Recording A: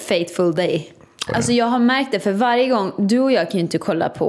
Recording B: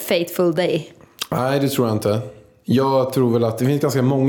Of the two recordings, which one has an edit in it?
A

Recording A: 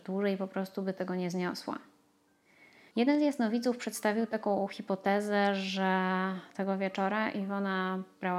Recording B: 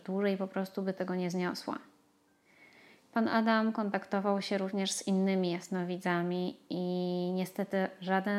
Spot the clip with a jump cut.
A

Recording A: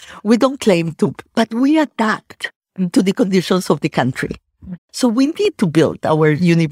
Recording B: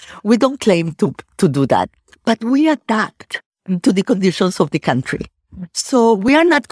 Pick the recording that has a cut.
A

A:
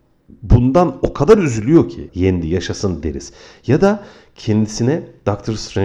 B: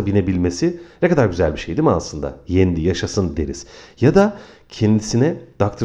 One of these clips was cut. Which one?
A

